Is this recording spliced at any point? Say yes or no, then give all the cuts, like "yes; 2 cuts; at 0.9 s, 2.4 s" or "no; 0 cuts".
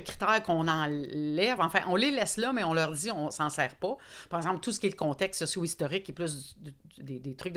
no; 0 cuts